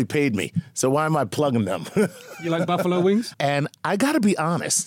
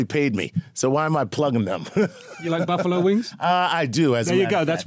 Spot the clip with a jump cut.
first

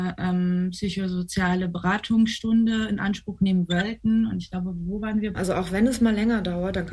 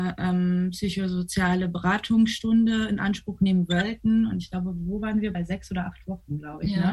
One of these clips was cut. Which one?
first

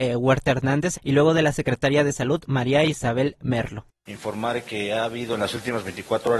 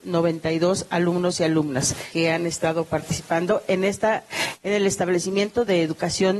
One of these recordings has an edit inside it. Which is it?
first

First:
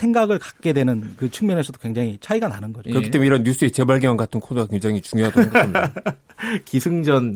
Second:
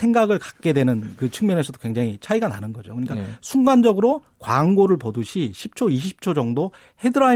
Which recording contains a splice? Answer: first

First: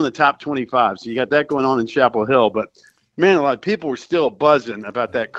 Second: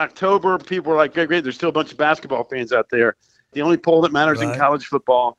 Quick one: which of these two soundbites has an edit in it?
second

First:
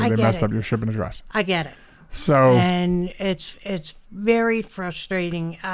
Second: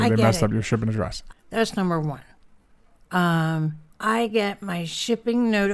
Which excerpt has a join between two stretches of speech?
second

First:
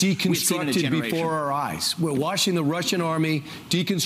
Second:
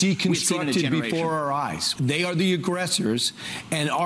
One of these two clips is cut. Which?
second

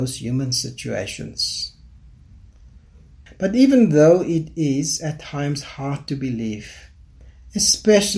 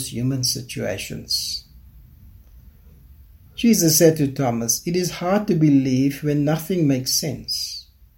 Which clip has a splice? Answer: first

